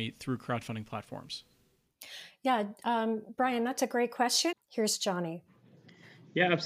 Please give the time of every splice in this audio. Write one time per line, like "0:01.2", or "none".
0:04.5